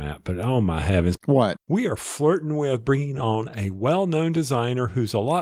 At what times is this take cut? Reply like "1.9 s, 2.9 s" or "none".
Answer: 1.2 s